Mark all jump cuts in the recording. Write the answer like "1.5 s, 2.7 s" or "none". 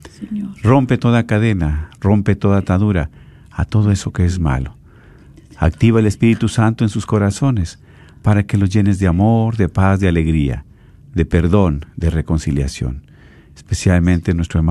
none